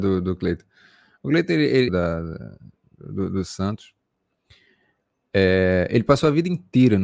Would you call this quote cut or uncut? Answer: cut